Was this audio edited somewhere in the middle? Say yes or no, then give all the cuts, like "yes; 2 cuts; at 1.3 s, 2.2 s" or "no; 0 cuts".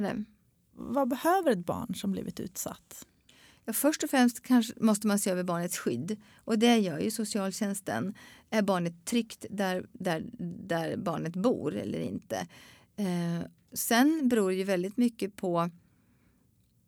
no; 0 cuts